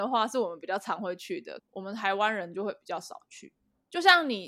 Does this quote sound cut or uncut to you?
cut